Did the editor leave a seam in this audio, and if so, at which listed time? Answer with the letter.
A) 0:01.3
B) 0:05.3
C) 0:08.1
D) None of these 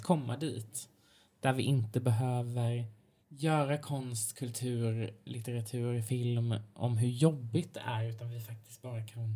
B